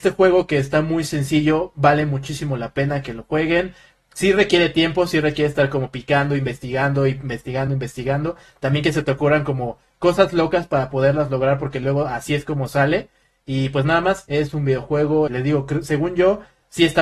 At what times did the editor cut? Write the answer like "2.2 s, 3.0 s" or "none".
7.7 s, 15.3 s